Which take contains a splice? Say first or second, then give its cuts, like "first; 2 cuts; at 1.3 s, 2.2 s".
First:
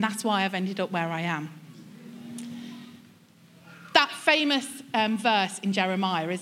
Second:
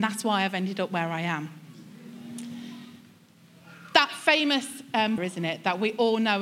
second; 1 cut; at 5.2 s